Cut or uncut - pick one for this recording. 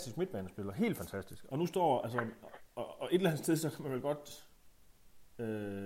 cut